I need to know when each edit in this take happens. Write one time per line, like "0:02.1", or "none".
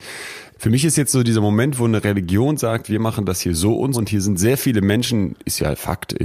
0:03.9